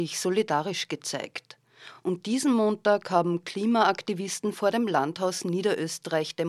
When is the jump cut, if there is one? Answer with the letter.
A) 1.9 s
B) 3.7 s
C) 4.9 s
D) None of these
D